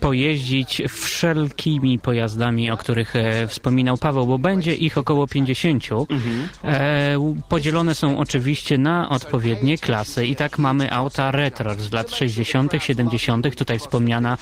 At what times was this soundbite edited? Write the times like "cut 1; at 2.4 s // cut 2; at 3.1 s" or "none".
none